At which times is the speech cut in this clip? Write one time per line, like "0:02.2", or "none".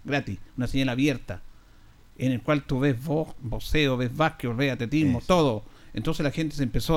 none